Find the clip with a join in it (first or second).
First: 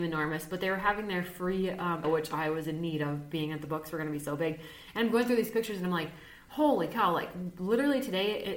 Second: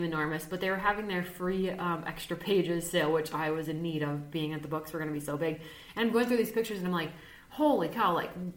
first